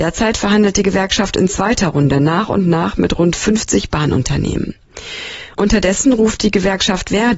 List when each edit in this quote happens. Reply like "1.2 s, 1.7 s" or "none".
none